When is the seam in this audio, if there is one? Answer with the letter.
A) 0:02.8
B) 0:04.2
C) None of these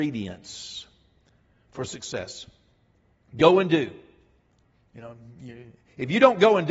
C